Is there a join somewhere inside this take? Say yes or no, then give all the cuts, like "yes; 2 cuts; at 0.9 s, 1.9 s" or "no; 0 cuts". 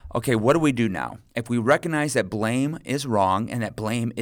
yes; 1 cut; at 1.3 s